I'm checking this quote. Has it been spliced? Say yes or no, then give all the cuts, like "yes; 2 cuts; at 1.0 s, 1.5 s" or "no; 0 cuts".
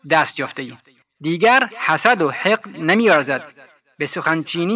yes; 1 cut; at 1.0 s